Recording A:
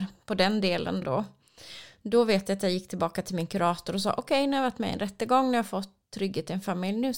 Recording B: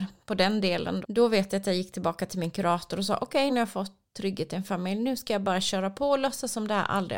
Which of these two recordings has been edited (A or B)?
B